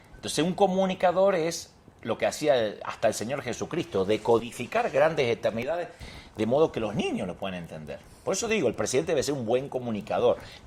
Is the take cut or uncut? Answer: uncut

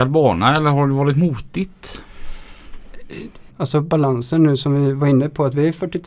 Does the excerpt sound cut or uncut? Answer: cut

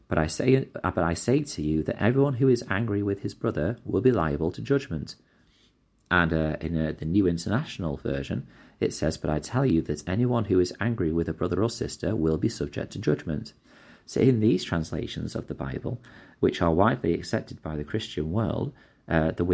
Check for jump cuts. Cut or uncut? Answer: uncut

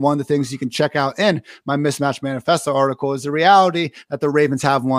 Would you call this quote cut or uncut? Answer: uncut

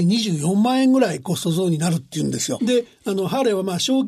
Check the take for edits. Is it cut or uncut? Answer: cut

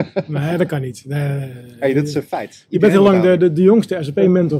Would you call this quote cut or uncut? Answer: uncut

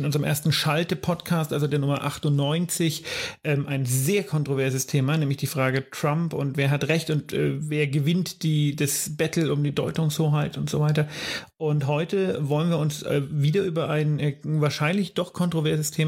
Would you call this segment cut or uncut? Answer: uncut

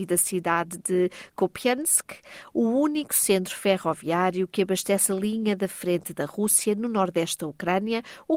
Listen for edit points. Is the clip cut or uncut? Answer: uncut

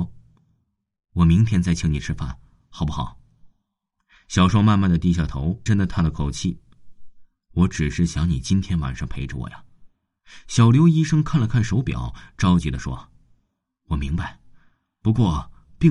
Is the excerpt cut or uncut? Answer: cut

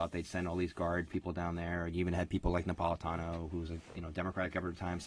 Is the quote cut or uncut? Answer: uncut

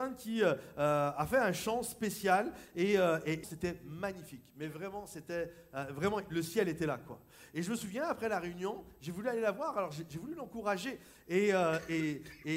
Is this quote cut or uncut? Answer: cut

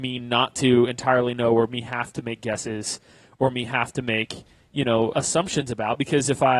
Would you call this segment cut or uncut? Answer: cut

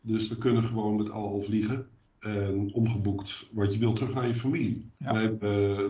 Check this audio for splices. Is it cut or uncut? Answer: cut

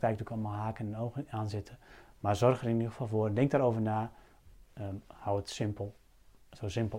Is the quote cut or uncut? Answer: uncut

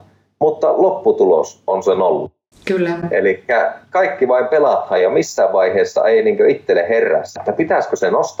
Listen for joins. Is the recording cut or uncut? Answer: cut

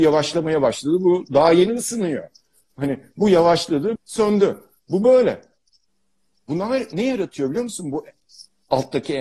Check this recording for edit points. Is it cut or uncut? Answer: cut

